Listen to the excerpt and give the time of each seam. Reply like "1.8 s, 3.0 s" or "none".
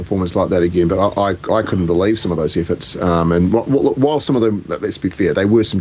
none